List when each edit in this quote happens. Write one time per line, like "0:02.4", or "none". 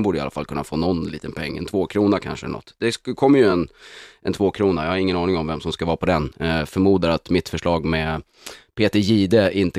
none